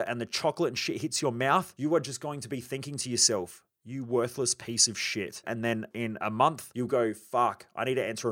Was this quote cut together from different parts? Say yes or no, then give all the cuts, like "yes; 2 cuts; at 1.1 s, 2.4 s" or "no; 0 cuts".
yes; 1 cut; at 5.4 s